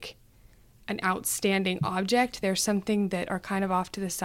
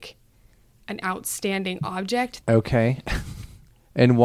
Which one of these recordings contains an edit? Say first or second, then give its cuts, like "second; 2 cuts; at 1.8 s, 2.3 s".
second; 1 cut; at 2.4 s